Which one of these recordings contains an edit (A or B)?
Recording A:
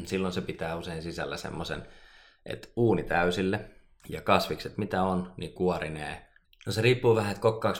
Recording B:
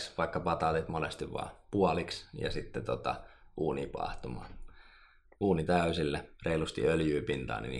A